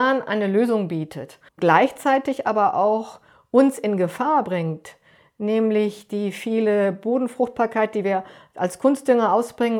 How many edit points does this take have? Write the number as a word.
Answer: one